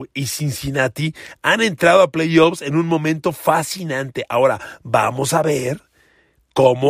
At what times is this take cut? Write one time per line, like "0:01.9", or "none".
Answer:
none

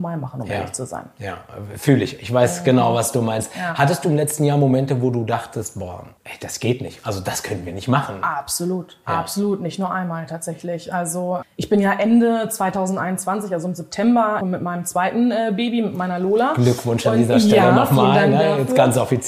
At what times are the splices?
0:06.2
0:11.4
0:14.4

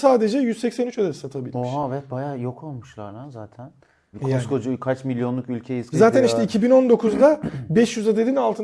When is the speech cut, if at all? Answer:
0:04.1
0:05.9

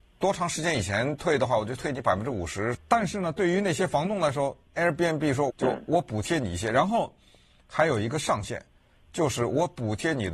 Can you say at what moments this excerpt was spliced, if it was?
0:02.7
0:05.5

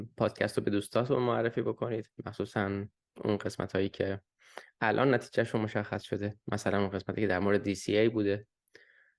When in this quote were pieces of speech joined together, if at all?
none

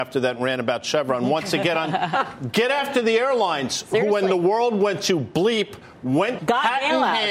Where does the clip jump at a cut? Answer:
0:06.4

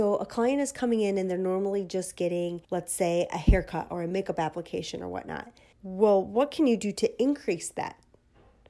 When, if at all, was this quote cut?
0:02.6
0:05.7

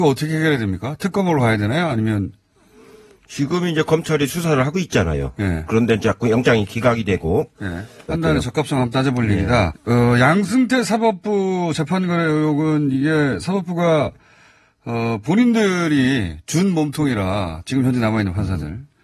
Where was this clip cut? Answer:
0:08.1
0:09.7

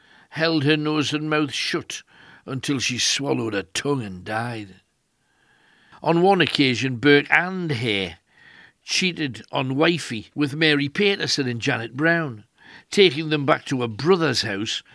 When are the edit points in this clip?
0:05.9
0:10.3

